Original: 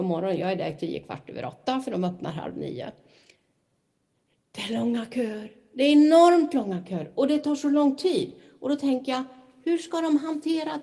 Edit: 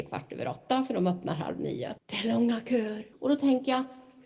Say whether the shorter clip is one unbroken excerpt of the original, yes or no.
no